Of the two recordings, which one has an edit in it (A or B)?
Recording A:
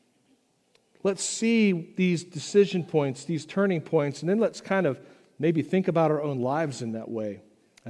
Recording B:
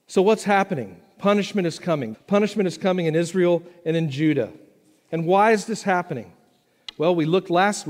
B